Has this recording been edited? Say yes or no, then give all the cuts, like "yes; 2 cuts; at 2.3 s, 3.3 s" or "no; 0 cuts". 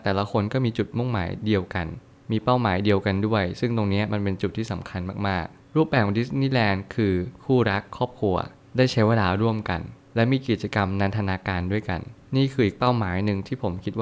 no; 0 cuts